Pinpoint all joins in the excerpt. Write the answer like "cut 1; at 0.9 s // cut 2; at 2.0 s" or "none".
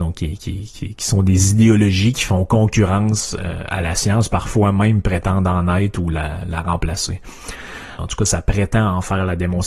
cut 1; at 8.0 s